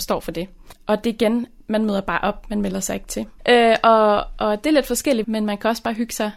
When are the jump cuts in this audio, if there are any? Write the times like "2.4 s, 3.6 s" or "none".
3.4 s, 5.2 s